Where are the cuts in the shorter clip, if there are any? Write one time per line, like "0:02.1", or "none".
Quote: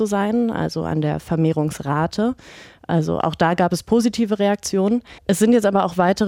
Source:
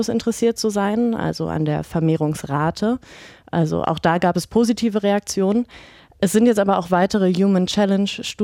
0:05.2

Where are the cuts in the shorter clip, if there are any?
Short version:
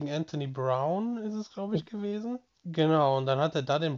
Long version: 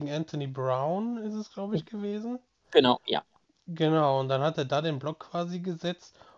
0:02.6

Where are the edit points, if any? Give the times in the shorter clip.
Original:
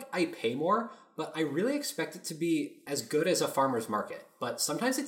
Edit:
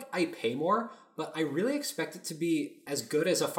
none

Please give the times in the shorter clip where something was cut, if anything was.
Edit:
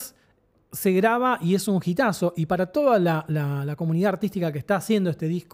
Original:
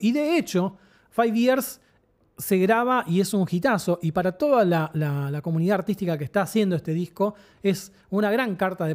none

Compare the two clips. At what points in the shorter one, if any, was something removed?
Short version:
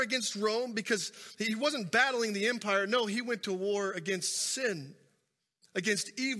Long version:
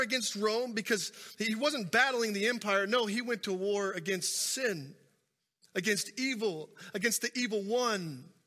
none

